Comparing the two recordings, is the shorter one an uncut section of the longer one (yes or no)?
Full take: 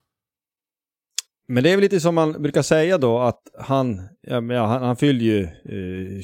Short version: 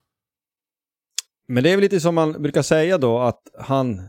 yes